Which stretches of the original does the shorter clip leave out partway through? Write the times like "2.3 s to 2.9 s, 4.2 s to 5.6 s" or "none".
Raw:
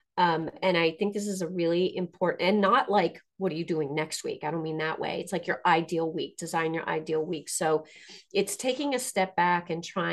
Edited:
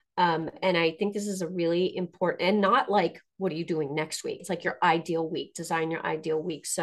4.4 s to 5.2 s